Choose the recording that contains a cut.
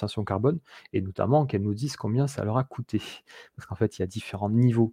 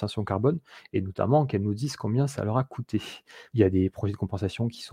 second; 1 cut; at 3.5 s

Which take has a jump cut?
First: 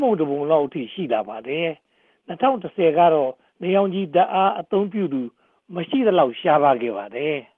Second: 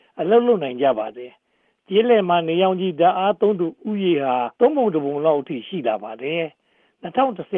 second; 1 cut; at 4.6 s

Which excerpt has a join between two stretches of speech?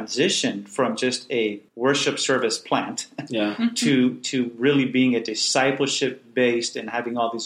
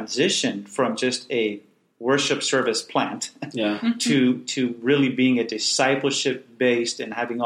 first; 1 cut; at 1.7 s

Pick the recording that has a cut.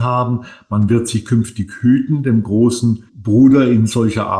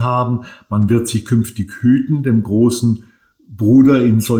first; 1 cut; at 3.1 s

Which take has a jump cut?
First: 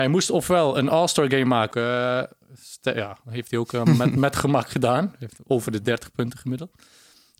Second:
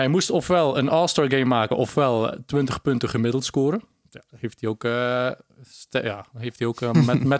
first; 1 cut; at 1.7 s

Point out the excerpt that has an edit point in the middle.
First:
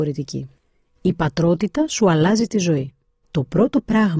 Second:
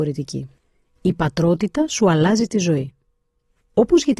first; 1 cut; at 3.2 s

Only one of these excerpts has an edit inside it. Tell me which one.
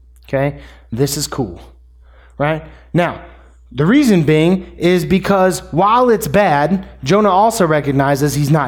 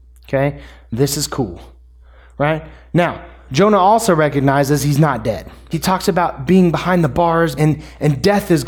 second; 3 cuts; at 3.5 s, 5.7 s, 7.6 s

